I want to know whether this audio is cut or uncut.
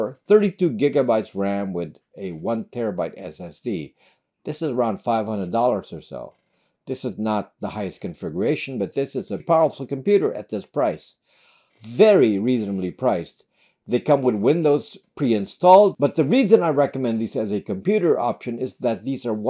cut